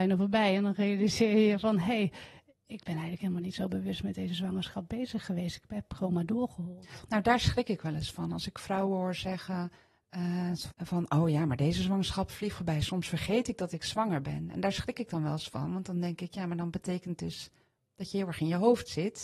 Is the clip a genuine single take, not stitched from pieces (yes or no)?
no